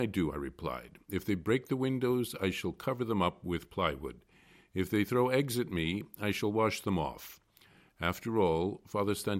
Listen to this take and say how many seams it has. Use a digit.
0